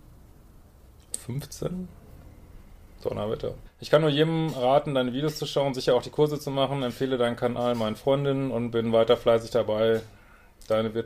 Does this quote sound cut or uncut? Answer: cut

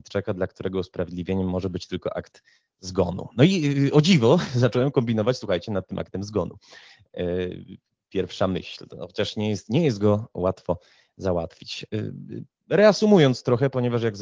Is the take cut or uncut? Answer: uncut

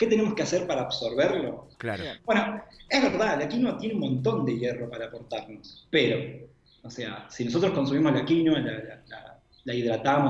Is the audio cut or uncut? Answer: cut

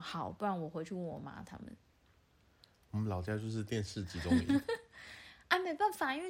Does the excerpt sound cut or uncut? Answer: uncut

